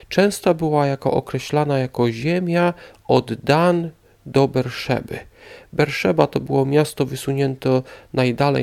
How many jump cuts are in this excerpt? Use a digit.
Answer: 0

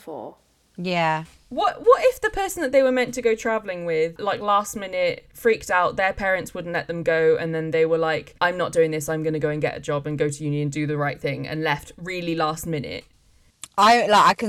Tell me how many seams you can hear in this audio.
1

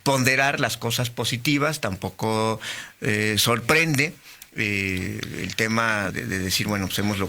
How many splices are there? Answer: 1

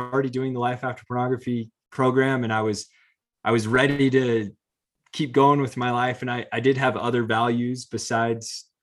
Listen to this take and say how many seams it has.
0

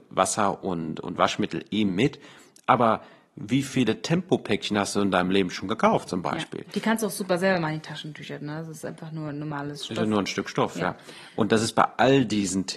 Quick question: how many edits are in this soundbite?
0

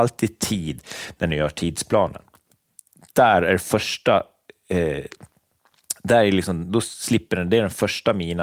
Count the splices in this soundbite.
0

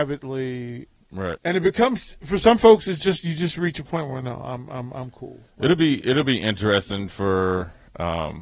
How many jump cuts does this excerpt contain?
1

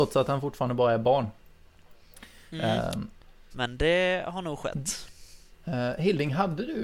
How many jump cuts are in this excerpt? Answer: 2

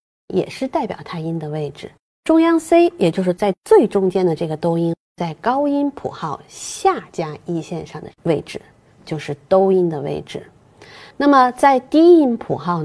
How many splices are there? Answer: 0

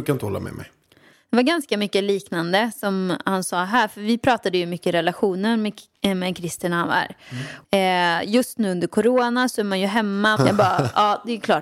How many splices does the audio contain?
3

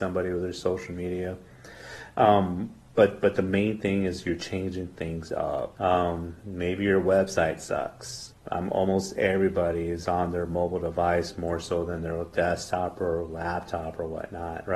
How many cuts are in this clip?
2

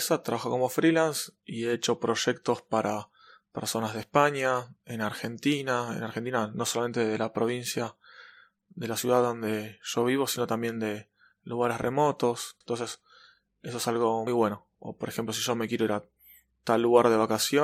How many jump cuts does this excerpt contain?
2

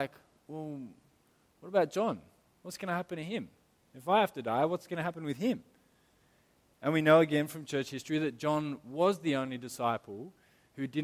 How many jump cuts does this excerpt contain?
0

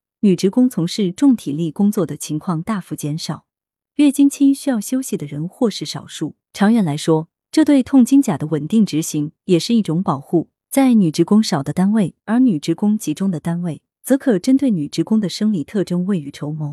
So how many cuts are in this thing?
3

